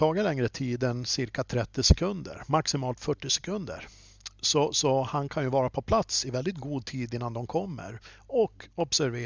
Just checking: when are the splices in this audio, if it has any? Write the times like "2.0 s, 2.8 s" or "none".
none